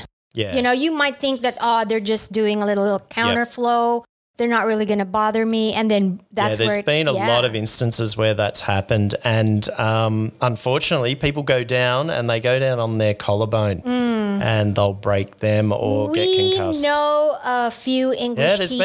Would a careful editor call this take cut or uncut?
uncut